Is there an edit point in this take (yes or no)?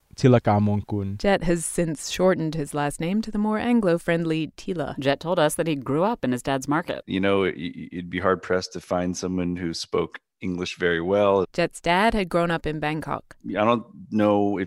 yes